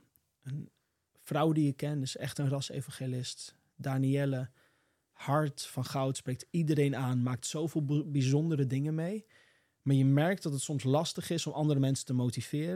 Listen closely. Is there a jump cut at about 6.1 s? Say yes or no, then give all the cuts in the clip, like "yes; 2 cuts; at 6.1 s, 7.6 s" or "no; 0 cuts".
no; 0 cuts